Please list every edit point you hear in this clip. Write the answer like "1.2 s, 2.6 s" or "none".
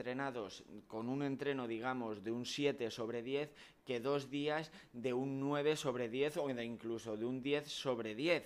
none

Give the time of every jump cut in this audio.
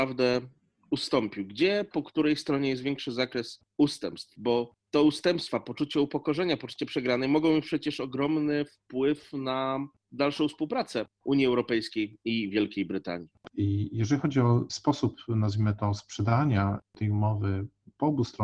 13.5 s

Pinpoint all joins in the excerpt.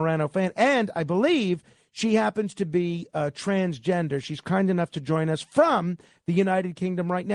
none

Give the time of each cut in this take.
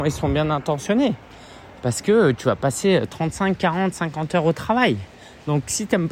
none

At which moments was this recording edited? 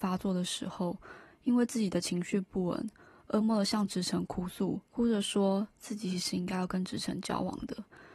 3.4 s, 4.8 s

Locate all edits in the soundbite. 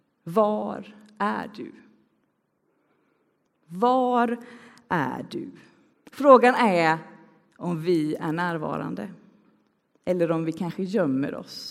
5.9 s

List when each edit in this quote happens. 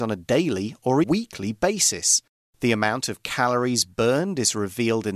1.0 s, 2.4 s

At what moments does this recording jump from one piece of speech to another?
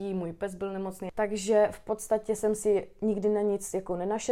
none

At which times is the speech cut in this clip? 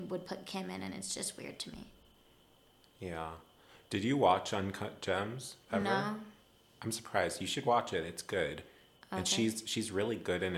none

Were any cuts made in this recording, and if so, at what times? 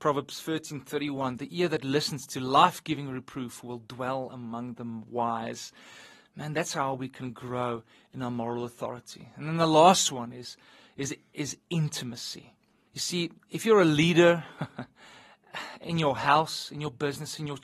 12.9 s

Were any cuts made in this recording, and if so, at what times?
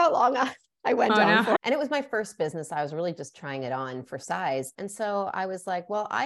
1.6 s, 4.7 s

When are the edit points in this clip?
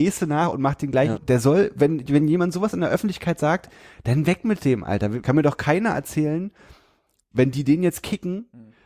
1.2 s, 5.2 s

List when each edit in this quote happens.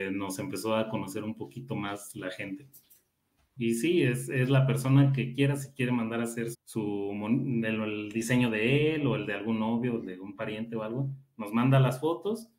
3.6 s, 6.5 s

